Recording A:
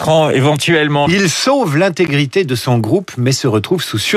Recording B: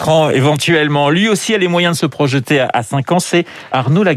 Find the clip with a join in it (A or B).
A